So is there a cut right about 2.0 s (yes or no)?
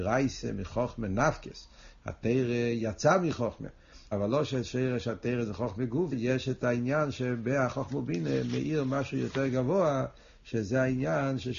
no